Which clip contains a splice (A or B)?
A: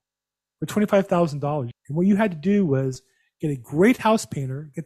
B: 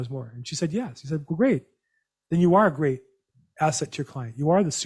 A